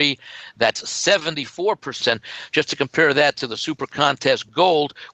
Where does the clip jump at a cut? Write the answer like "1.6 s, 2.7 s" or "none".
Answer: 2.0 s